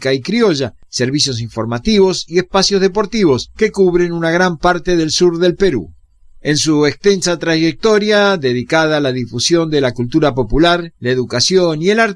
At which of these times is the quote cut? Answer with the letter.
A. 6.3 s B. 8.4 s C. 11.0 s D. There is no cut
D